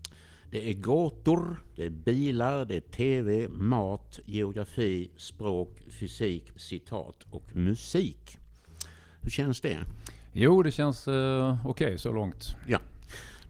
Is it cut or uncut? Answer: cut